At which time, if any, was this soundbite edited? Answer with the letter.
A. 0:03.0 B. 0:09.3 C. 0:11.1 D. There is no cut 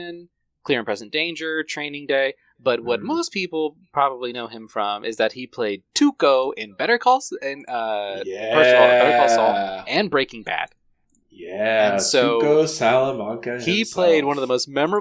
D